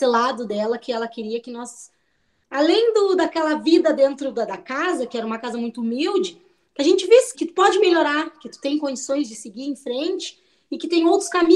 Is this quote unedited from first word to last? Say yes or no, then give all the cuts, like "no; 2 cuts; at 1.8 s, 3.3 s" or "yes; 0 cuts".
no; 1 cut; at 7.3 s